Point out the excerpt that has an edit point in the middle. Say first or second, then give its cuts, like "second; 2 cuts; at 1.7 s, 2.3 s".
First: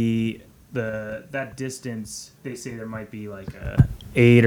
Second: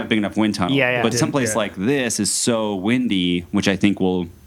first; 1 cut; at 2.4 s